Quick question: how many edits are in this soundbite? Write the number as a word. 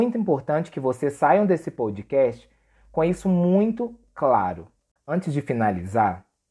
one